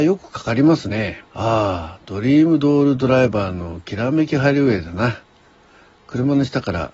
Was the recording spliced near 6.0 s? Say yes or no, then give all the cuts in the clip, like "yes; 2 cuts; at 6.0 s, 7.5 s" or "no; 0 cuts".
no; 1 cut; at 1.3 s